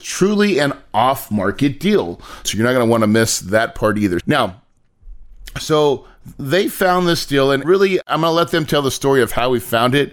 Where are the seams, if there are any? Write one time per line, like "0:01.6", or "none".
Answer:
0:02.4
0:04.2